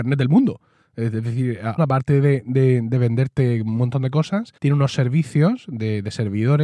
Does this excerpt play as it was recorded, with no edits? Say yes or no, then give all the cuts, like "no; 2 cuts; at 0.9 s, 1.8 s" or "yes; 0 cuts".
no; 2 cuts; at 1.8 s, 4.6 s